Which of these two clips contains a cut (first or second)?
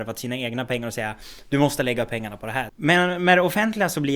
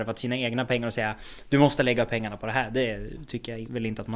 first